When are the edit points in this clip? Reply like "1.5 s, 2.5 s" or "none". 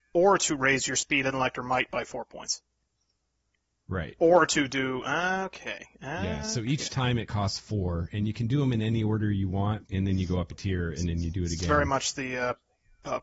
9.8 s